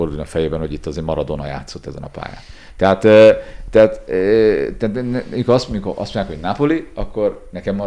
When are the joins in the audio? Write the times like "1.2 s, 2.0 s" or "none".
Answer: none